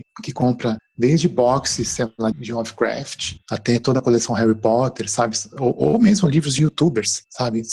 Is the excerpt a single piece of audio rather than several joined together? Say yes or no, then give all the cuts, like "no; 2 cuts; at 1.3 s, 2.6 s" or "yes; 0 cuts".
no; 1 cut; at 2.3 s